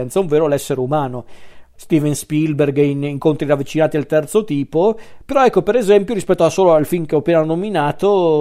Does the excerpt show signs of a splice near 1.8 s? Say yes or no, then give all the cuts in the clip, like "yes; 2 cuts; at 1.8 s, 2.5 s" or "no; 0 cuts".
yes; 1 cut; at 1.8 s